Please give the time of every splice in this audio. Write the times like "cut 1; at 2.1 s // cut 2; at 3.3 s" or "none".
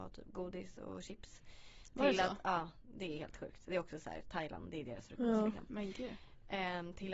none